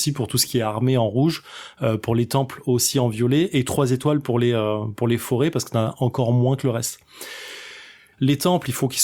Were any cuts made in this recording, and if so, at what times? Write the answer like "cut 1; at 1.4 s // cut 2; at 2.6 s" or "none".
cut 1; at 8.1 s